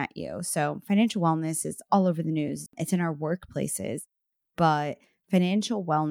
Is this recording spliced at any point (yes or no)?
yes